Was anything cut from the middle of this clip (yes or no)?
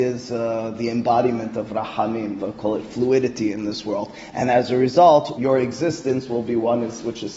yes